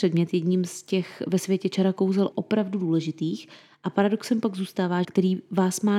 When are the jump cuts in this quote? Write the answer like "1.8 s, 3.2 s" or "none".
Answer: 2.3 s, 5.0 s